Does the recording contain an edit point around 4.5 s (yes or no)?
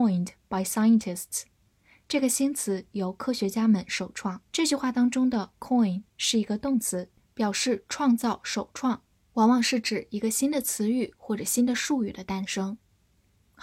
yes